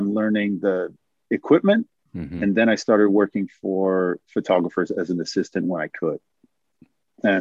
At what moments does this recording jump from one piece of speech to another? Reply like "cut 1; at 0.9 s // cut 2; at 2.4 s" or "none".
none